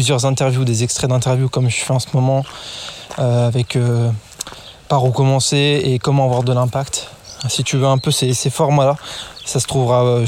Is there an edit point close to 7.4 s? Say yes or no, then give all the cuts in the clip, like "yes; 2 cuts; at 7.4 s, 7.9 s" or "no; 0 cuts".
no; 0 cuts